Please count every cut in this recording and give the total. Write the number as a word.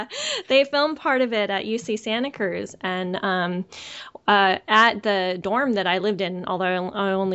zero